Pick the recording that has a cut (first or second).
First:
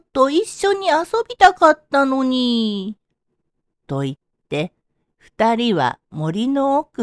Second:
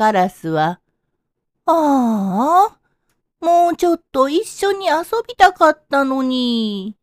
first